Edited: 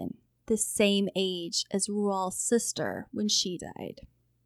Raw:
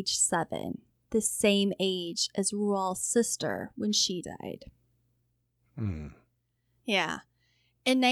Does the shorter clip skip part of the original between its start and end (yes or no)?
no